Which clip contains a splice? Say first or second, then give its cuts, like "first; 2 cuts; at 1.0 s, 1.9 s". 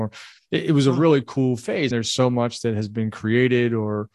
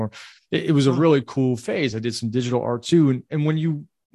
first; 1 cut; at 1.9 s